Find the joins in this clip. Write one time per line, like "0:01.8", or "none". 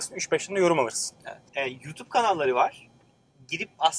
0:01.5